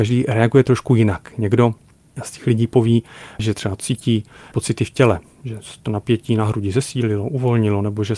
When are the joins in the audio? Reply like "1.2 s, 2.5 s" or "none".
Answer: none